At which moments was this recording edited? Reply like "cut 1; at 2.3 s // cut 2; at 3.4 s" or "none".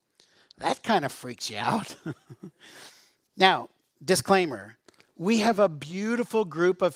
none